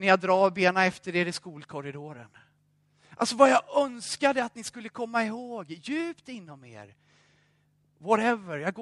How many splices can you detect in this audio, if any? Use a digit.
0